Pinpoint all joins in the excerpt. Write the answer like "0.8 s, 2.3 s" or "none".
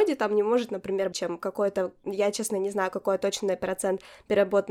1.1 s